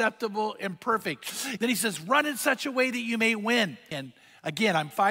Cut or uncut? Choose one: cut